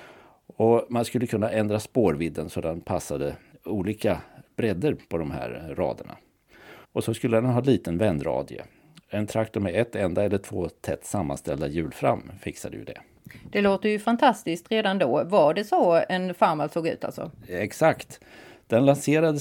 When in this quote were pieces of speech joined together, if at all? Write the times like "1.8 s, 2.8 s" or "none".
6.8 s